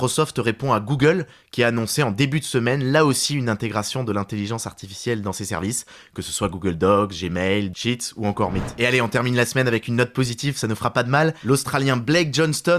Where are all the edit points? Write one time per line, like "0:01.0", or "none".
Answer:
0:07.7